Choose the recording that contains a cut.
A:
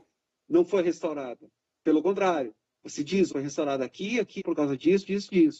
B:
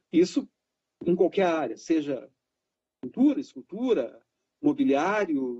A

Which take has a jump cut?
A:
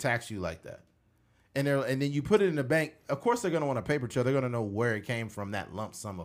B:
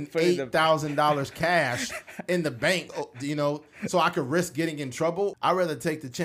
B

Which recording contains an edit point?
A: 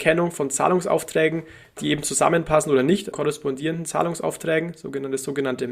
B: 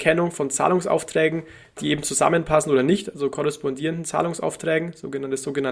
A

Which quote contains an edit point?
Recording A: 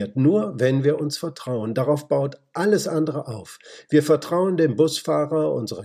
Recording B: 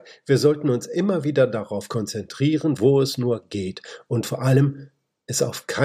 B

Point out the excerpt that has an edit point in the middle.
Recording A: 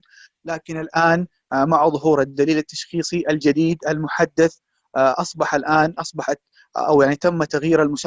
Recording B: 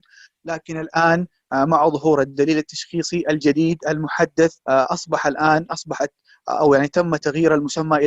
B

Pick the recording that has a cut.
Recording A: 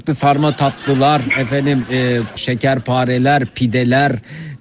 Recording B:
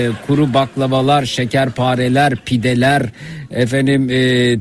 A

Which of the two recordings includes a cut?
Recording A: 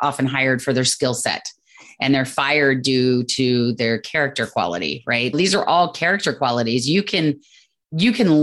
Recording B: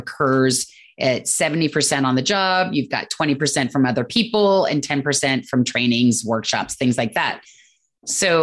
A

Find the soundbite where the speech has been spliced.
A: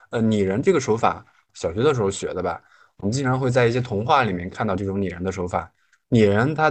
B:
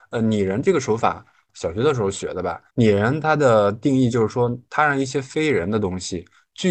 B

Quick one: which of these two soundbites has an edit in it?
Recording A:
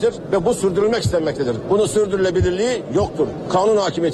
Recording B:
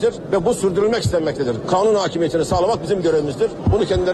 B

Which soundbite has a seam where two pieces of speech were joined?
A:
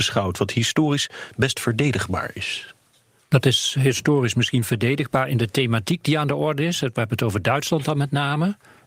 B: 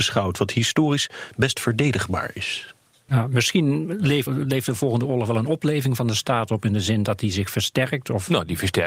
B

